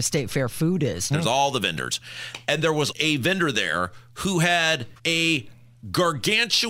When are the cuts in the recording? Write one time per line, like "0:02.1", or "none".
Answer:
0:01.1
0:02.9
0:05.0